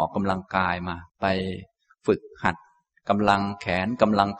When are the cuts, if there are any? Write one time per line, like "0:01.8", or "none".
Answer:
0:01.1